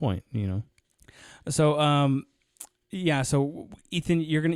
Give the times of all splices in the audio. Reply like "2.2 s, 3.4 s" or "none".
none